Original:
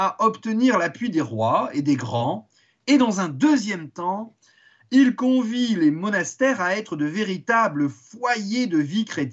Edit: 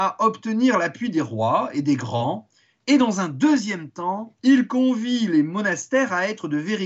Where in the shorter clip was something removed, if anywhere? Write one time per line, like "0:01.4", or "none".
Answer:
0:04.4